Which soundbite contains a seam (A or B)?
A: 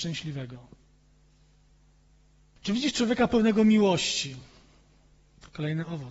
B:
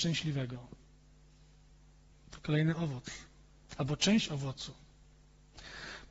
B